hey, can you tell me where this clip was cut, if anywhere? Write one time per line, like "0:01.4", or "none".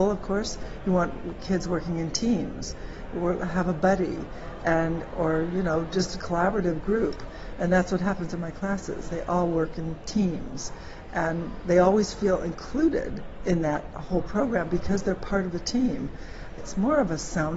0:16.6